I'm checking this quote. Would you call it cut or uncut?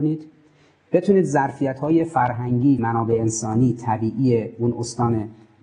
cut